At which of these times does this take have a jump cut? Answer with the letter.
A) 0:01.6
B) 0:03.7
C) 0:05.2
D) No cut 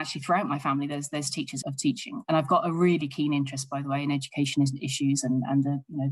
A